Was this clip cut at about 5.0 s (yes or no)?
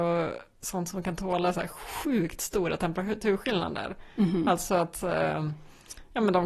no